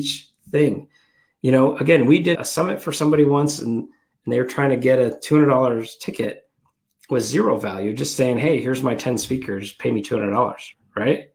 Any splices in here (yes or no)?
yes